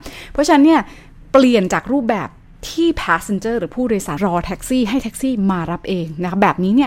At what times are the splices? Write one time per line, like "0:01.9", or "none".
0:04.2